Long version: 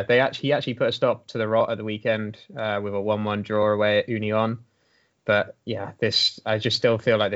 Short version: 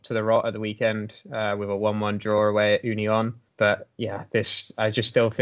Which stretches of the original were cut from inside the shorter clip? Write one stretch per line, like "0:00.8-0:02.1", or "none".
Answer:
0:04.7-0:05.2